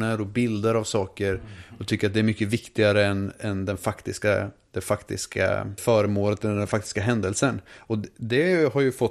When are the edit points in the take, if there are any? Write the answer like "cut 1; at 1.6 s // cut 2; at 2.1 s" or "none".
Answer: cut 1; at 5.8 s